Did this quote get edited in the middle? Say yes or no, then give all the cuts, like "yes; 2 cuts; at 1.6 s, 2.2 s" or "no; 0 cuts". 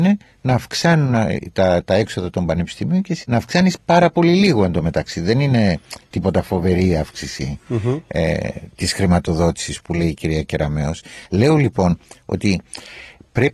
yes; 1 cut; at 3.2 s